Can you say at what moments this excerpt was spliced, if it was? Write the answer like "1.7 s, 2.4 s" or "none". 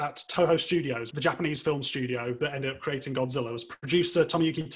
1.1 s